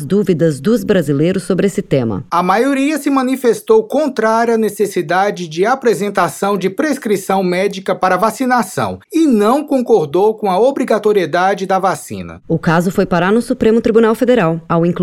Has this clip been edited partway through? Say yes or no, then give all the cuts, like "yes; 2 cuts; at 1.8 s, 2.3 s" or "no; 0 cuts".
yes; 1 cut; at 2.3 s